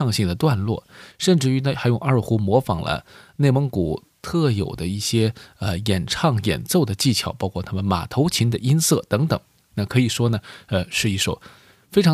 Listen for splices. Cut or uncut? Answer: uncut